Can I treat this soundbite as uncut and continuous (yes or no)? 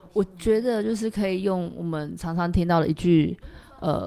yes